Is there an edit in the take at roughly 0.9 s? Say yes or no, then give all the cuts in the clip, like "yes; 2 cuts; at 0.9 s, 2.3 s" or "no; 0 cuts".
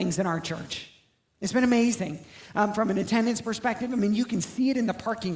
no; 0 cuts